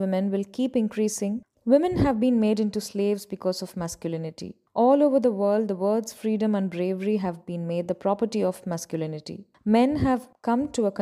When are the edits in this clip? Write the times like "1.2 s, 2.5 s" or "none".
1.5 s